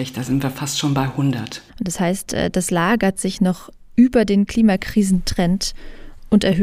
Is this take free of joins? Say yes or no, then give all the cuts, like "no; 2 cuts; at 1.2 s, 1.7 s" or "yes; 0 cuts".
no; 1 cut; at 1.7 s